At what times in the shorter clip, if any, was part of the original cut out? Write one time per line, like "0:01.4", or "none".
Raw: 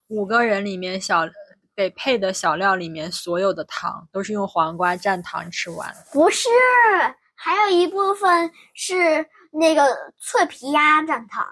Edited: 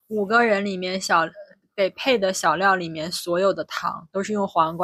none